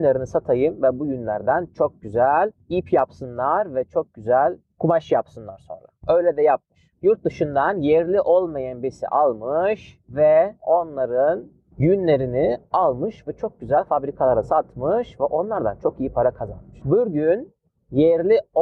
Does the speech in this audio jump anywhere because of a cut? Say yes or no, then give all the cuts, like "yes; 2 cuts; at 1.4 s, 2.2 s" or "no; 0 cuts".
no; 0 cuts